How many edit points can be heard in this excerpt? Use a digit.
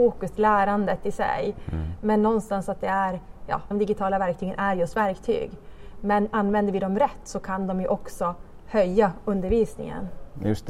1